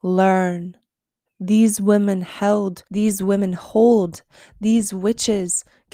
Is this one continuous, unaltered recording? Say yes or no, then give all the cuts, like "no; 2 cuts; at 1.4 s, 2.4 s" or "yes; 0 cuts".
no; 2 cuts; at 1.3 s, 2.9 s